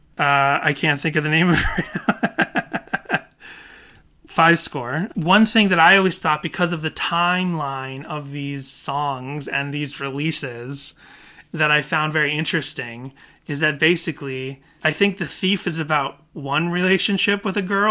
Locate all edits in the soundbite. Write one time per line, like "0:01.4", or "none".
0:05.1

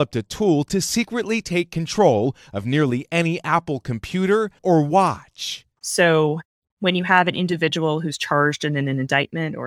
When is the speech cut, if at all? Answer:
0:04.6
0:05.8

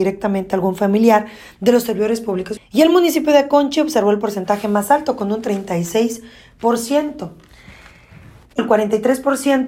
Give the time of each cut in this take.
0:02.6
0:08.6

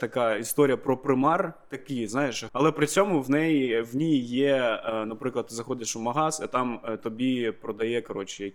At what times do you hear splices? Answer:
0:02.5

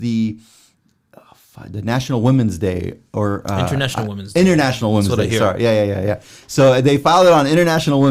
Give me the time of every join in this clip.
none

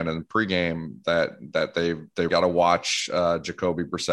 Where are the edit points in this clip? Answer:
0:02.3

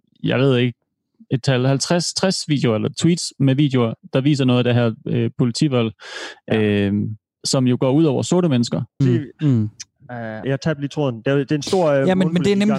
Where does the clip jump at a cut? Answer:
0:09.0
0:10.4

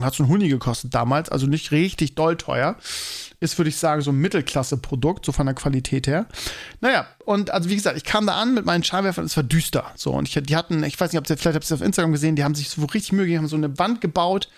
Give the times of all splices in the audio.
none

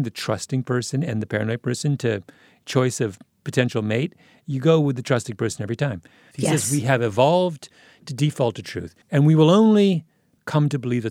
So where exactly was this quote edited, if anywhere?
0:06.3
0:09.0

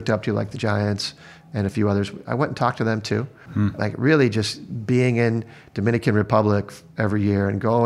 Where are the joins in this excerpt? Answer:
0:03.5

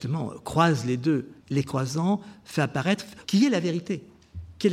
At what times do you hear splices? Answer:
0:01.4
0:03.2

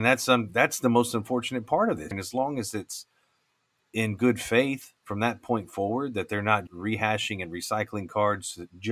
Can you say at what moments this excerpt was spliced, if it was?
0:02.1
0:06.7

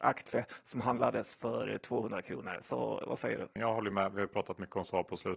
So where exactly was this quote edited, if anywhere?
0:03.6

